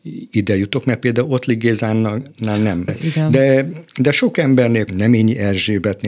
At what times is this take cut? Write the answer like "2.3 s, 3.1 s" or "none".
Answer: 2.9 s, 4.9 s